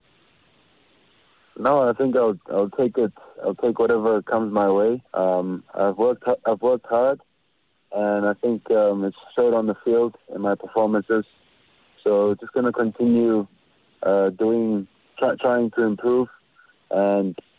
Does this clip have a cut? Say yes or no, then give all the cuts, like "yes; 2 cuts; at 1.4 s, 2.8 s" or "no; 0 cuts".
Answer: yes; 1 cut; at 5.1 s